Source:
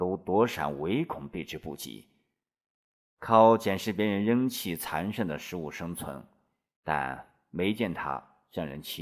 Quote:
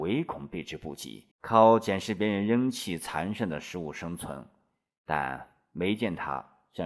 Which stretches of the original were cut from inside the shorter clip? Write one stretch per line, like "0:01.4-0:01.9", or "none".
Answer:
0:02.1-0:03.1